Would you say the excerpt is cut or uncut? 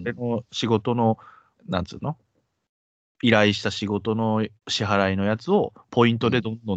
cut